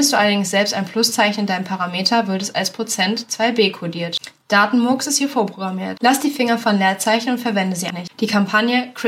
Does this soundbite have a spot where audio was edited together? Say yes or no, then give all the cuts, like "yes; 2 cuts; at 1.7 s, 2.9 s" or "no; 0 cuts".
yes; 1 cut; at 7.9 s